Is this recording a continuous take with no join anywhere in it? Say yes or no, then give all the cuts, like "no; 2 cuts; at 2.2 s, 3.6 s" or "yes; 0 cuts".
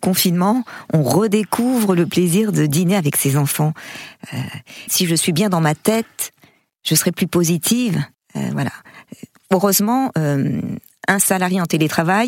no; 2 cuts; at 4.9 s, 8.1 s